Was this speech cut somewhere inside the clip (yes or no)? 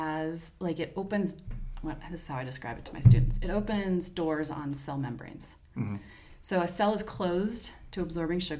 no